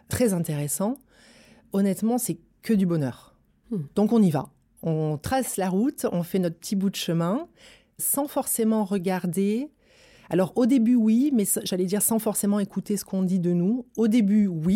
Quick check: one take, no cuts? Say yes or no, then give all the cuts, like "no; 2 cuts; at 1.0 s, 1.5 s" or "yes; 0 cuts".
yes; 0 cuts